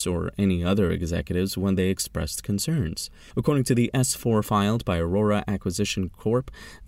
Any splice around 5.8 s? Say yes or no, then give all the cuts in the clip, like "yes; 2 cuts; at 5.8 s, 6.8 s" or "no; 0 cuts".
no; 1 cut; at 3.3 s